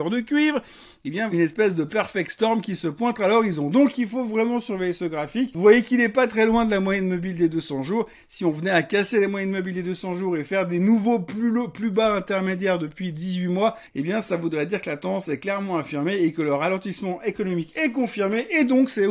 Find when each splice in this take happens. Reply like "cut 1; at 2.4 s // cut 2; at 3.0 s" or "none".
cut 1; at 1.3 s